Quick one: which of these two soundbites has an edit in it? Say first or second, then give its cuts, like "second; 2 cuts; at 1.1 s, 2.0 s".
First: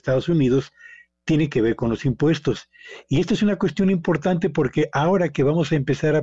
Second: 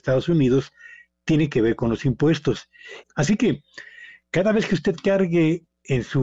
second; 1 cut; at 3.0 s